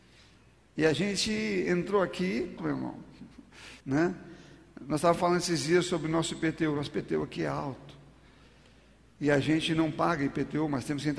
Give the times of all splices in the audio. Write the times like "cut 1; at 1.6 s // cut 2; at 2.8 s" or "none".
cut 1; at 2.6 s // cut 2; at 3.8 s